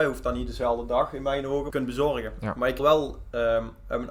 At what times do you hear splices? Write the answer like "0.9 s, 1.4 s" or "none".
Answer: 1.7 s, 2.8 s

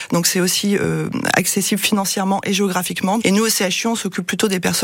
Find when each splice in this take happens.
3.2 s

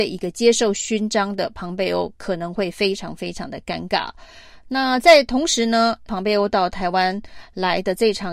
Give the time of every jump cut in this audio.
4.6 s, 6.1 s

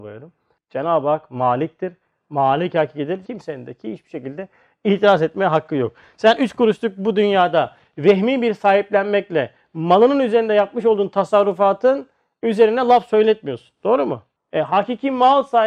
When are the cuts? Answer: 3.2 s

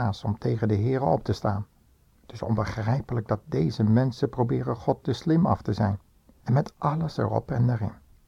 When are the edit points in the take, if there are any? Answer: 6.4 s

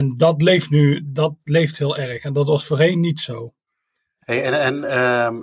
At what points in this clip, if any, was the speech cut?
4.2 s

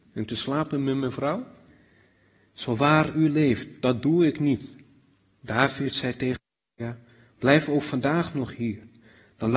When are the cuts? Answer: none

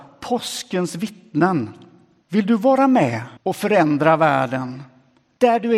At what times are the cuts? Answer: 2.2 s, 3.4 s

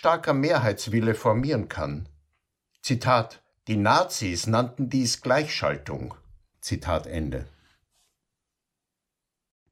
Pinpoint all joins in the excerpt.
6.5 s

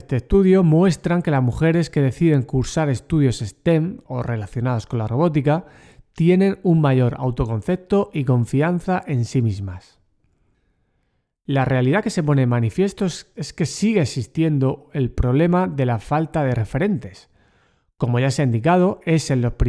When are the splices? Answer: none

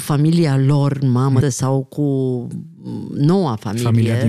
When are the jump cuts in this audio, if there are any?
1.4 s

